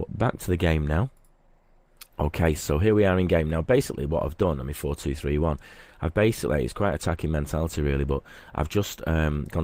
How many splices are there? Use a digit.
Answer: 1